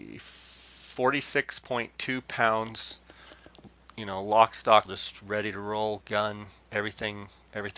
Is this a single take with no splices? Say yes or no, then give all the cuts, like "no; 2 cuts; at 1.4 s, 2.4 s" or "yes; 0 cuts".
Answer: no; 1 cut; at 4.9 s